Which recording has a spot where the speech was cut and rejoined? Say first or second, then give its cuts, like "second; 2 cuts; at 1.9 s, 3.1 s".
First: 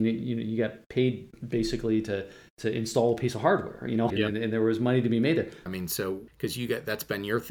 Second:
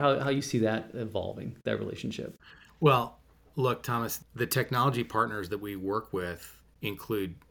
first; 2 cuts; at 4.1 s, 5.7 s